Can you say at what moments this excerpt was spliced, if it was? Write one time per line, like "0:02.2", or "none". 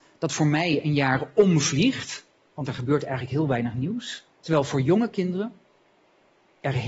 0:04.3